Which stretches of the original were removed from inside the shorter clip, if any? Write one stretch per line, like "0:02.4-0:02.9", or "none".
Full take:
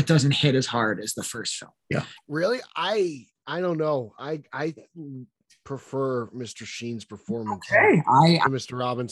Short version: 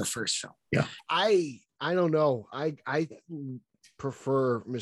0:02.2-0:02.7

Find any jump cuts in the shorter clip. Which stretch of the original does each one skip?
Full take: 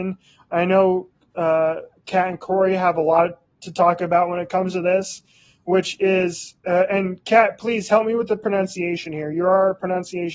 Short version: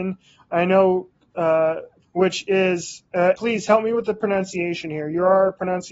0:02.0-0:05.5
0:06.9-0:07.6

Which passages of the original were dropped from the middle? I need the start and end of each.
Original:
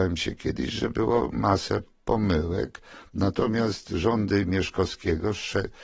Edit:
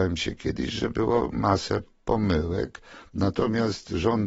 none

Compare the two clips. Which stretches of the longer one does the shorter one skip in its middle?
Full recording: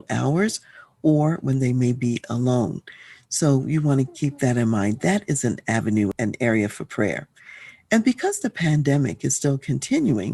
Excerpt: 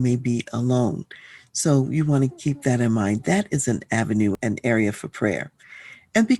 none

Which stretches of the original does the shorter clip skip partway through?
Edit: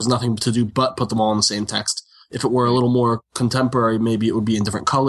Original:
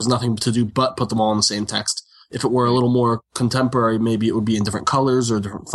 none

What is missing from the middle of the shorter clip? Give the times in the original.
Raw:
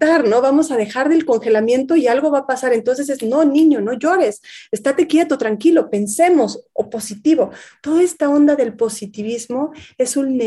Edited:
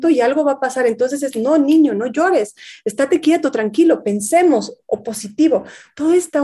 none

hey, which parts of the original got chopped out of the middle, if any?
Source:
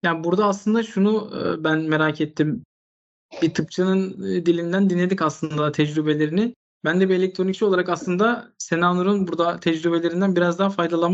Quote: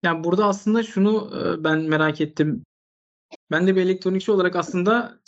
0:03.3-0:06.7

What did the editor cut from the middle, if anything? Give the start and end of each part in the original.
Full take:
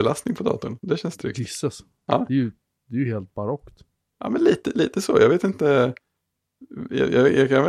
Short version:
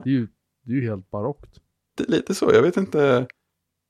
0:04.2-0:04.6

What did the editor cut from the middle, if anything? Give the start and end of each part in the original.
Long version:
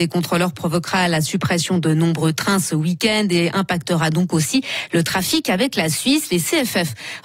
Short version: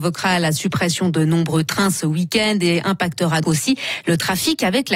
0:04.1-0:04.3

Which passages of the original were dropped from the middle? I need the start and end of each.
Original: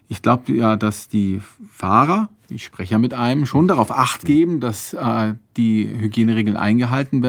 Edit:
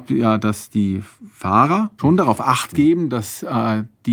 0:02.4-0:03.5

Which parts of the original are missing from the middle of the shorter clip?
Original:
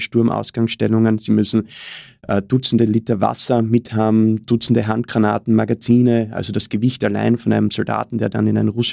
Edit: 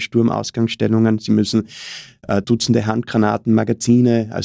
0:02.4-0:04.4

